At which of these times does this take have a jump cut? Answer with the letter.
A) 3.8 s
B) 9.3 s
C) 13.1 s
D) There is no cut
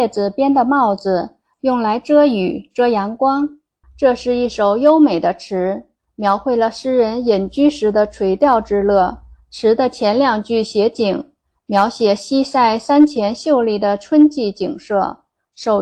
A